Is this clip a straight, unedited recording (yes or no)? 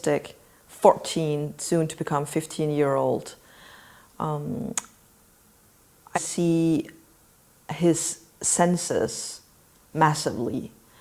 no